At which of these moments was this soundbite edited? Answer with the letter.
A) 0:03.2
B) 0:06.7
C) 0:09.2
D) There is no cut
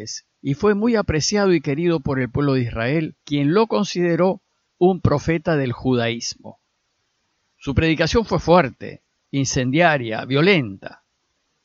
A